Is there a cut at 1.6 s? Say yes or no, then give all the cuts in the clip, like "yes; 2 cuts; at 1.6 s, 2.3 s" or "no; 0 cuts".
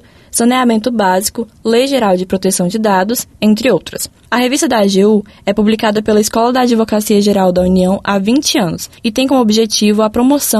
no; 1 cut; at 4.2 s